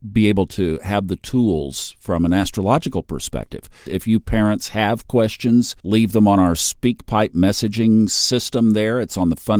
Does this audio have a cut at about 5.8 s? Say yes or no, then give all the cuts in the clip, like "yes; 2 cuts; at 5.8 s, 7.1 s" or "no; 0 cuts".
yes; 2 cuts; at 3.9 s, 5.8 s